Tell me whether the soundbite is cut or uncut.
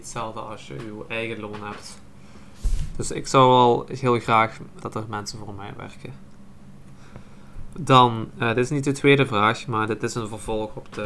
cut